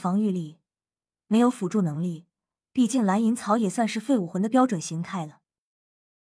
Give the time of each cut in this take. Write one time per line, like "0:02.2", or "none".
none